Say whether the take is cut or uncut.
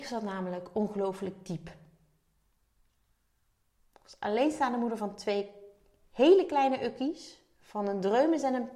uncut